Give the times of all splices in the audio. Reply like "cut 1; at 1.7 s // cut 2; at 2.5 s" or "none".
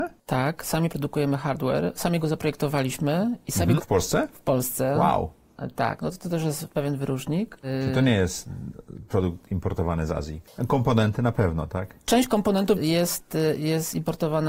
cut 1; at 3.8 s // cut 2; at 12.7 s